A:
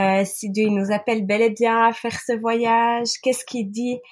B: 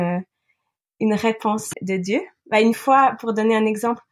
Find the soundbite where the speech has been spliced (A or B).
B